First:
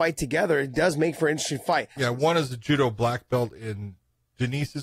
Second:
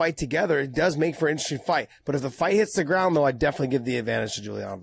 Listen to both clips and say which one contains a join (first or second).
first